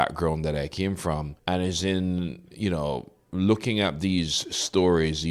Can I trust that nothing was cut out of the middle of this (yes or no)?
no